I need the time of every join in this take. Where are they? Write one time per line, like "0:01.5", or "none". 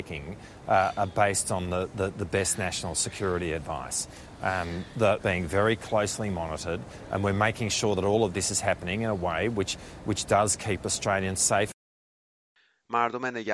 0:05.2